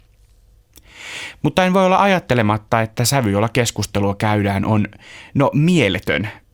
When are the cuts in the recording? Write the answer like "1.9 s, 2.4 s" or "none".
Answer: none